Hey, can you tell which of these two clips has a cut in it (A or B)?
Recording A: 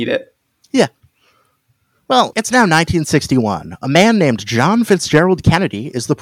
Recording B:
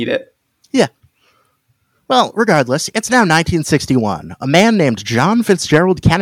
A